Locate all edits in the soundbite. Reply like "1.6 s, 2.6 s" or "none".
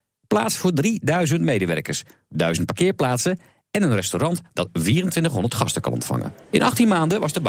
none